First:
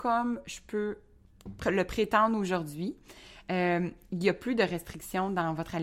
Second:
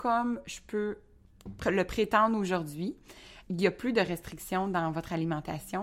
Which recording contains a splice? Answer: second; 1 cut; at 3.4 s

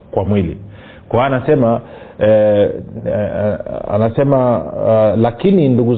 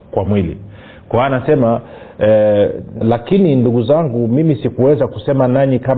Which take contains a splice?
second; 1 cut; at 3.0 s

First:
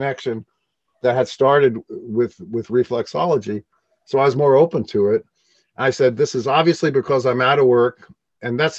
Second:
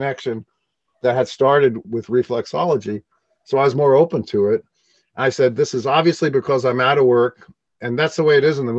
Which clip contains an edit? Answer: second; 1 cut; at 1.8 s

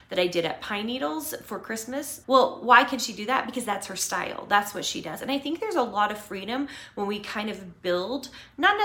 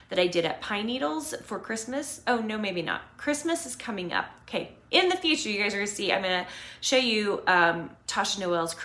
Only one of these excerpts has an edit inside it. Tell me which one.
first; 1 cut; at 2.2 s

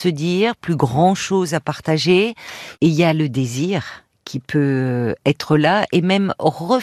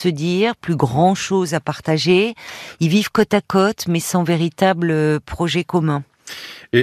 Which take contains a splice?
first; 1 cut; at 2.8 s

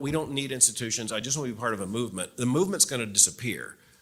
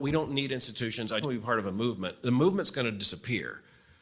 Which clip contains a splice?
second; 1 cut; at 1.2 s

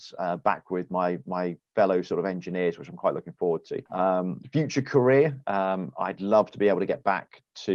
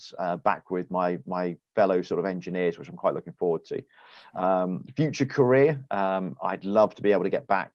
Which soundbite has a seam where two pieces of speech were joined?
first; 1 cut; at 3.9 s

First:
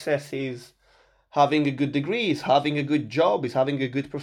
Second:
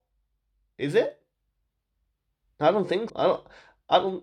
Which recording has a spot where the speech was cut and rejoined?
second; 1 cut; at 3.1 s

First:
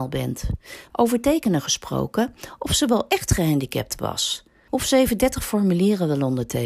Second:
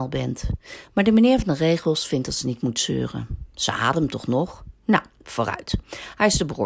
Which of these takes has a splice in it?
first; 2 cuts; at 0.9 s, 4.7 s

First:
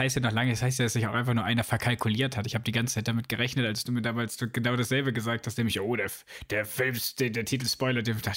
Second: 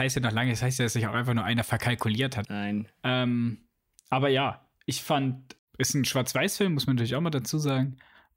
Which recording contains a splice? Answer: second; 2 cuts; at 2.4 s, 5.6 s

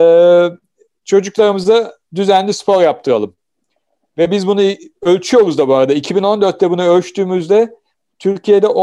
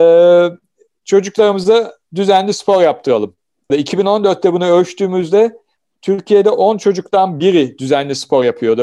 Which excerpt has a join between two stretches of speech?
second; 1 cut; at 3.7 s

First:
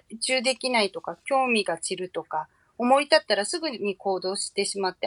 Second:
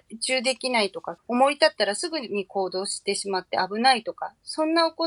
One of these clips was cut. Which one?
second; 1 cut; at 1.2 s

